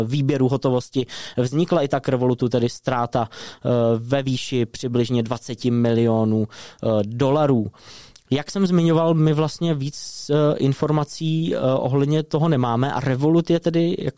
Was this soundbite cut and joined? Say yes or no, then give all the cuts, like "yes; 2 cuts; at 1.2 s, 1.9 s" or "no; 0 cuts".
no; 0 cuts